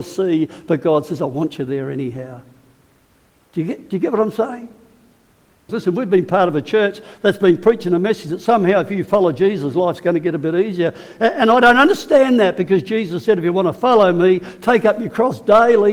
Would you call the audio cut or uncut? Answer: cut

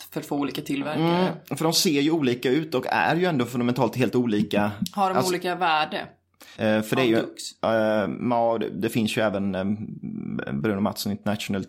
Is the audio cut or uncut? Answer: cut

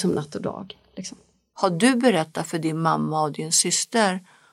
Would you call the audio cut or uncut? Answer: uncut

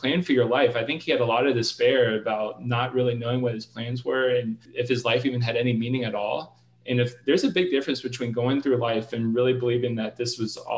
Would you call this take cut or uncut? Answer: cut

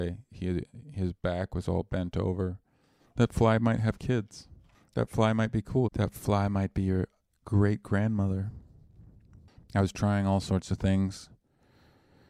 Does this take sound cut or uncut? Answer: cut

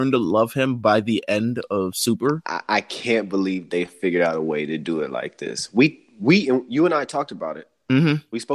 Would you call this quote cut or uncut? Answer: uncut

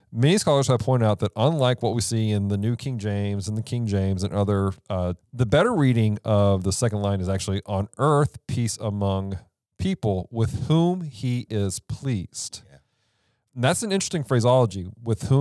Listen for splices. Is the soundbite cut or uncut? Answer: cut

